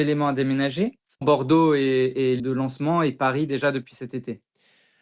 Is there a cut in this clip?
yes; 2 cuts; at 1.2 s, 2.4 s

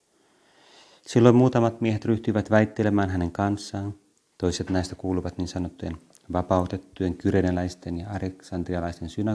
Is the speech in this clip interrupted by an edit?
no; 0 cuts

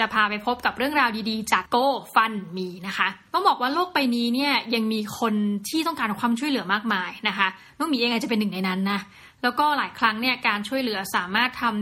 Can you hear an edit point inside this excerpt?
no; 0 cuts

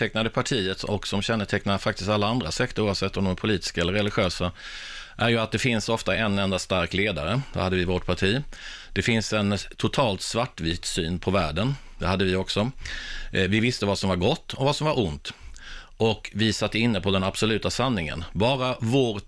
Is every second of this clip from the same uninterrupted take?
yes; 0 cuts

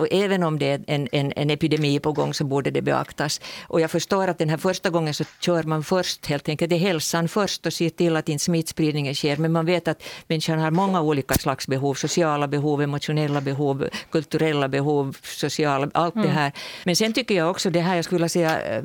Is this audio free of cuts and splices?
no; 2 cuts; at 1.1 s, 16.8 s

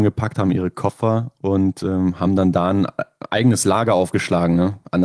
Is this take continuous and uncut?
yes; 0 cuts

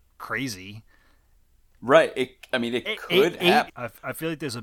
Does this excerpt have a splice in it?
yes; 1 cut; at 3.7 s

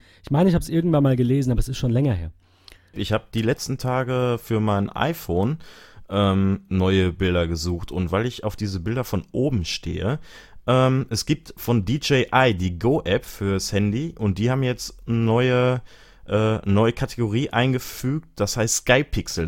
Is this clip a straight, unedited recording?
no; 1 cut; at 2.9 s

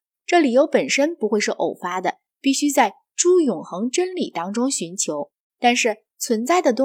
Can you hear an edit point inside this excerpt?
no; 0 cuts

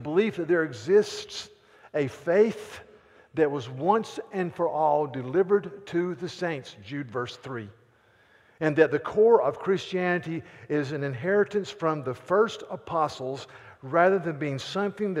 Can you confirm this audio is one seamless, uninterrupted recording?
yes; 0 cuts

